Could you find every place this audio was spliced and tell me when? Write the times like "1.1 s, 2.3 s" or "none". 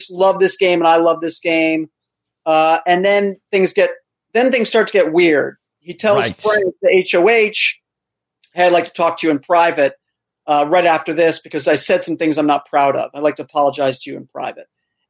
none